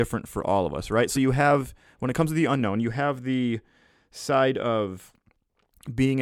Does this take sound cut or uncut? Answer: uncut